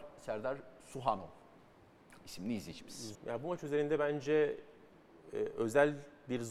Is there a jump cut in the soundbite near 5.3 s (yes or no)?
no